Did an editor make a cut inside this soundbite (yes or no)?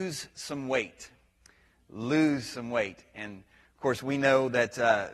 no